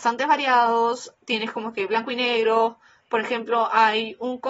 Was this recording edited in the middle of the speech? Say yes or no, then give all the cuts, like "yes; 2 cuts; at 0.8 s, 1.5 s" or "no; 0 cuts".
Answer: no; 0 cuts